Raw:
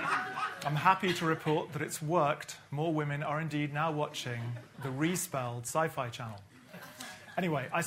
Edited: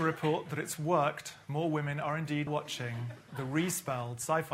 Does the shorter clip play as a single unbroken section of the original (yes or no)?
no